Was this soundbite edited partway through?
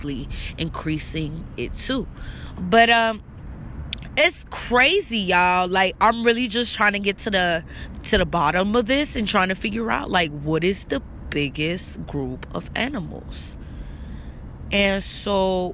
yes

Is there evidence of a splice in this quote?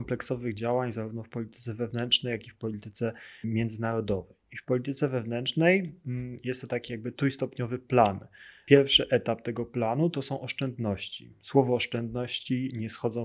no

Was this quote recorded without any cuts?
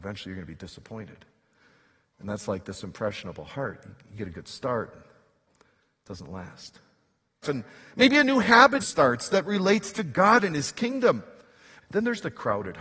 no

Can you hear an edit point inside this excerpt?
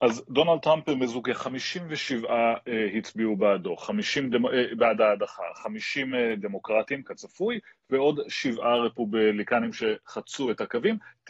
no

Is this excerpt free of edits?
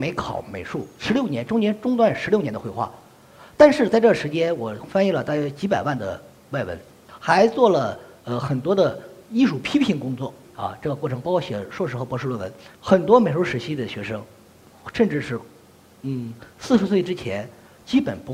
no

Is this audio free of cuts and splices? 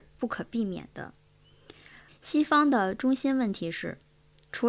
no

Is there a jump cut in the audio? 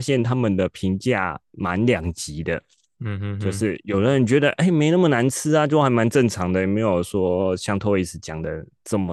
no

